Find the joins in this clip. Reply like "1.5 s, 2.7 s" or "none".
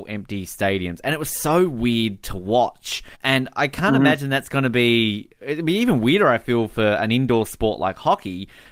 3.1 s